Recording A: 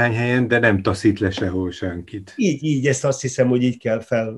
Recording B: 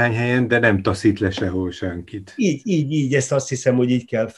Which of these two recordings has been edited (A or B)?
A